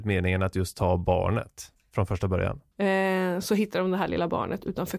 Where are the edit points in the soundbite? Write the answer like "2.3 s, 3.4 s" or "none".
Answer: 2.7 s